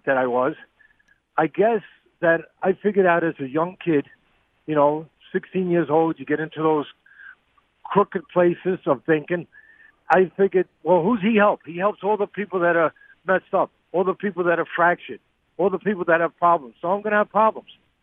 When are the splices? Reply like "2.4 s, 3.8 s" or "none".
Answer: 10.8 s, 13.8 s

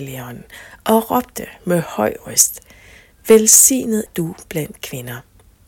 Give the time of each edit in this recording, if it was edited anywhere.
4.1 s

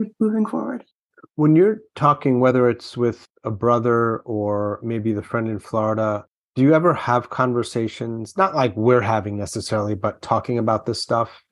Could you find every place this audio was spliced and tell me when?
none

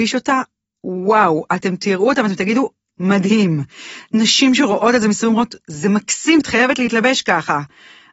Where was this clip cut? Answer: 6.4 s

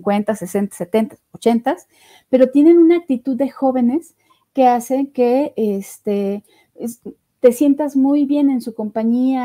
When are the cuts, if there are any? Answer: none

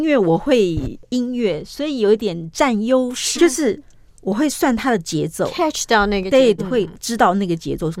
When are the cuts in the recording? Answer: 3.3 s, 6.6 s

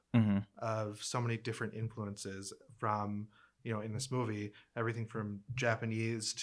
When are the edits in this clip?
none

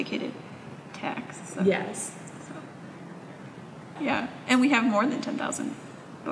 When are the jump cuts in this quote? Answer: 4.0 s

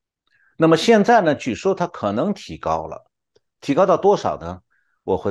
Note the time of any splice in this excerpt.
none

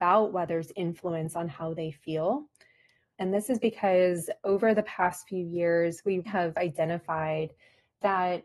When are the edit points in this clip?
3.1 s, 6.3 s

